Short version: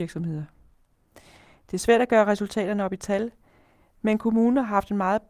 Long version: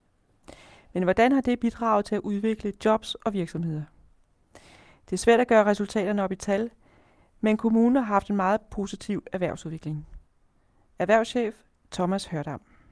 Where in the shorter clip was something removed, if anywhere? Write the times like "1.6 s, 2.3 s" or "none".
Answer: none